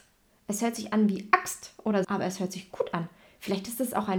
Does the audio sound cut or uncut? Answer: cut